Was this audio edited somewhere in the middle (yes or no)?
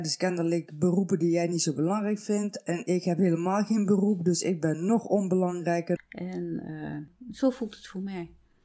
yes